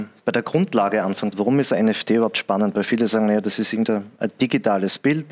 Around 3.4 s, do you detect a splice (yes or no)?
no